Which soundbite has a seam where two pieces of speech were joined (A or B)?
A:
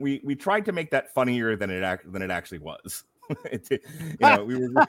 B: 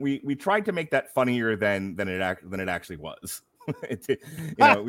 A